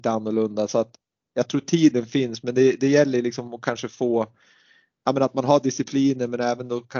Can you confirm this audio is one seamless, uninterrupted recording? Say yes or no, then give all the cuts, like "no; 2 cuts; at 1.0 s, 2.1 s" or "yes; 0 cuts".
yes; 0 cuts